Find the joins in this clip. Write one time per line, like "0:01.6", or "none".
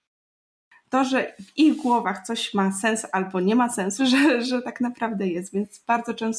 0:04.0